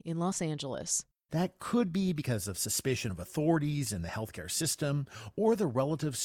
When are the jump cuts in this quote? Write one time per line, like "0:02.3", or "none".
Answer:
0:01.3

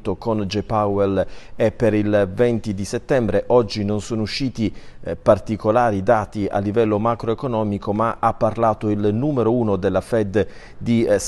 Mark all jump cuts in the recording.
none

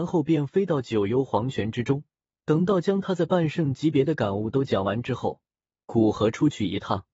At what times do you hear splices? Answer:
0:02.3

